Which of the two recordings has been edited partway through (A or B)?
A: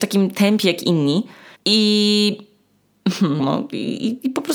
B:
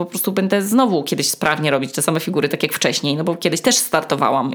A